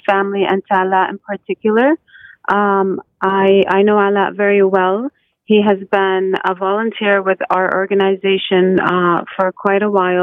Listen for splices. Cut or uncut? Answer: uncut